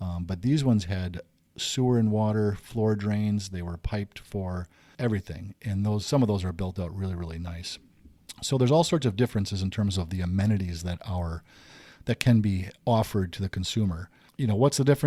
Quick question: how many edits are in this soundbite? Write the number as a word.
zero